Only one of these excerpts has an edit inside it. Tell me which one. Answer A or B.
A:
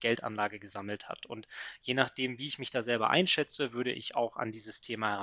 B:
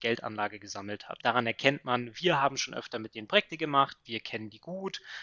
B